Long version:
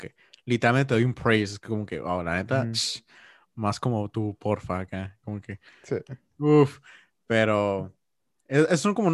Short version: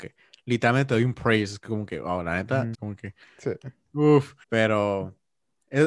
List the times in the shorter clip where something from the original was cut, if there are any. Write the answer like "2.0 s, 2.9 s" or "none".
2.7 s, 4.4 s